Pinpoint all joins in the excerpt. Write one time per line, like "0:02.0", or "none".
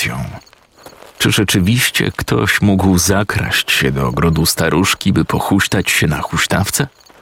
none